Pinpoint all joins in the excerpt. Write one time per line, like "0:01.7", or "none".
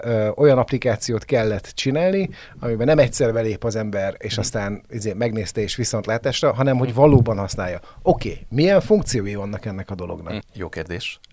0:10.4